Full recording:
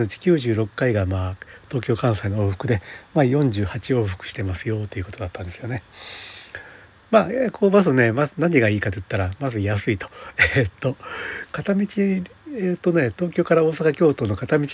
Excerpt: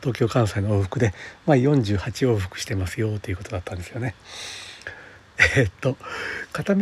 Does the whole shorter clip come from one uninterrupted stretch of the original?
no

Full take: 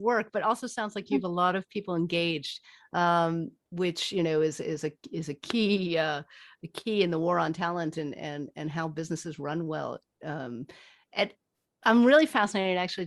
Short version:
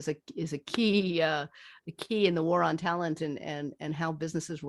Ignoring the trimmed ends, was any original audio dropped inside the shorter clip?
no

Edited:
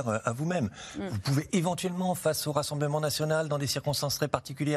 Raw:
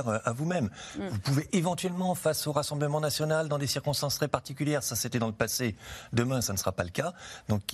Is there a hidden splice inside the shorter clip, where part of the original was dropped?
no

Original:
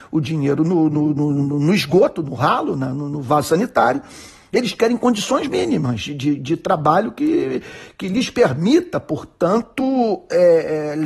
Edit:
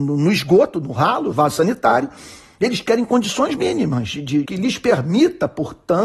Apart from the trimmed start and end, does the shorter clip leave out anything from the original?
yes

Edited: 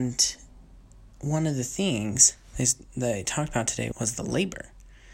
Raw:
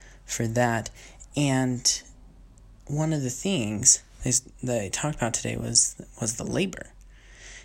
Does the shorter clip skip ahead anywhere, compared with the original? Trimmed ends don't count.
yes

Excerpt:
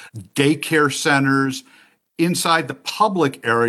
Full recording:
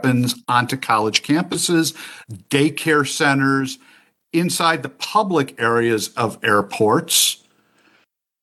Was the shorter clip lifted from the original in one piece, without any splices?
yes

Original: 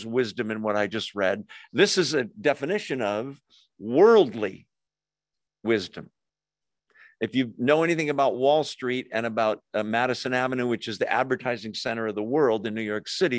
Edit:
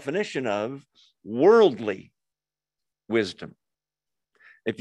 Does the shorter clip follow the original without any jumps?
yes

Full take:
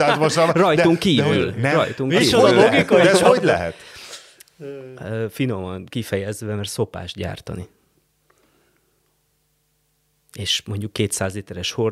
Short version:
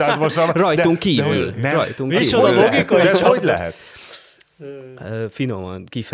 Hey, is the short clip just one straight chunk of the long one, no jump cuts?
yes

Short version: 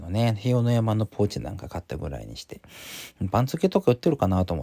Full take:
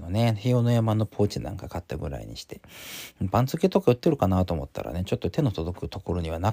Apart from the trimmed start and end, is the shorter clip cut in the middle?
no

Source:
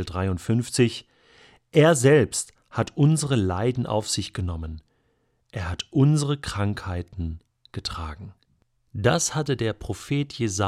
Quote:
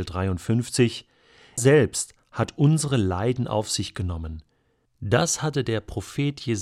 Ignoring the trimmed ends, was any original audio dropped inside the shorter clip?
yes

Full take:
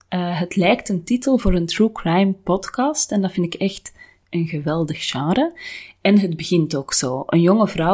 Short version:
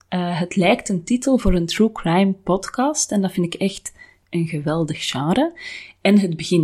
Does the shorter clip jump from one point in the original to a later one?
no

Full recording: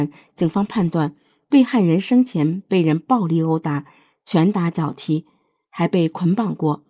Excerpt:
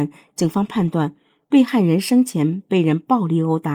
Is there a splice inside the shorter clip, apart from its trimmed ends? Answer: no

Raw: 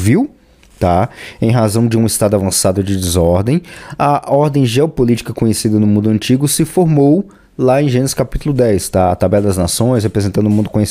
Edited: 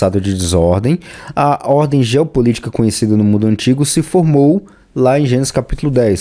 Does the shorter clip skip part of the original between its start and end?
no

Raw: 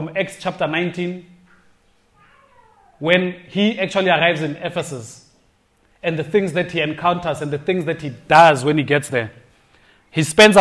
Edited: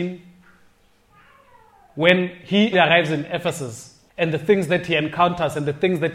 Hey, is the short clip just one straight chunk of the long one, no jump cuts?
no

